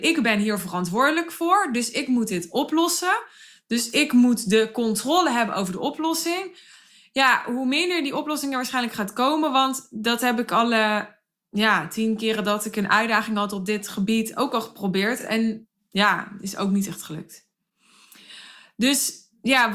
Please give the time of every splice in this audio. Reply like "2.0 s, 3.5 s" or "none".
none